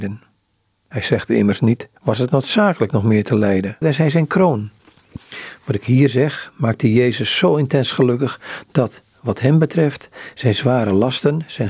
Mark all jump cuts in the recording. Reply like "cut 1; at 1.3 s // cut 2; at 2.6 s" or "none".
cut 1; at 2.0 s // cut 2; at 3.8 s